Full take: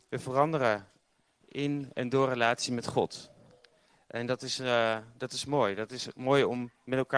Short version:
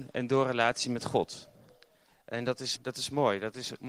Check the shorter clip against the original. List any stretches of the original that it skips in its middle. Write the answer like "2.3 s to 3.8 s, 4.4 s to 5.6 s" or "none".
4.6 s to 5.1 s